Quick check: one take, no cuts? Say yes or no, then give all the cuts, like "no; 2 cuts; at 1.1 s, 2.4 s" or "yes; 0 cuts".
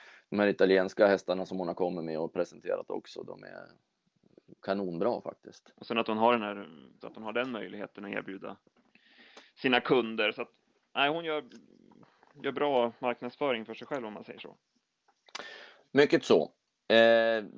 no; 1 cut; at 7.0 s